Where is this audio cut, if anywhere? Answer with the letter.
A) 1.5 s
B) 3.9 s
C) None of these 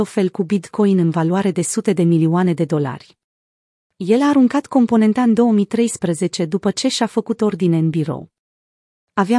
C